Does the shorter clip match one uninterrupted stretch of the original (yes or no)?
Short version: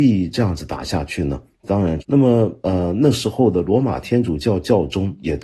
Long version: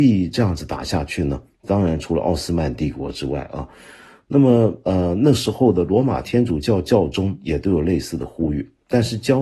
no